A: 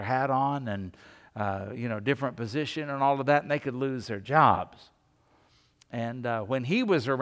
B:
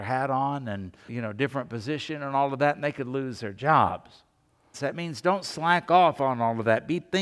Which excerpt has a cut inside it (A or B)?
B